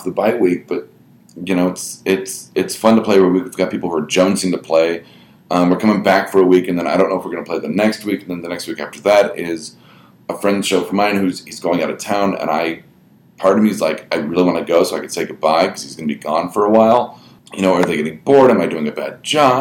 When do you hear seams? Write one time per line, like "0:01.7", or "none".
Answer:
0:17.4